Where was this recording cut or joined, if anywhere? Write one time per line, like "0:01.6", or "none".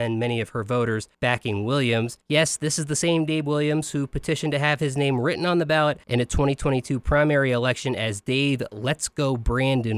none